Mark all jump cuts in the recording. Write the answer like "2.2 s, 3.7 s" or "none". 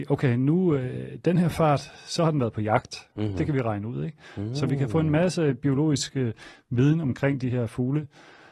none